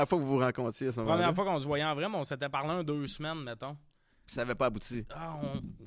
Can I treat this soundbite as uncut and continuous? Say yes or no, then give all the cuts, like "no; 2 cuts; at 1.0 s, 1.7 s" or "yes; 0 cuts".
yes; 0 cuts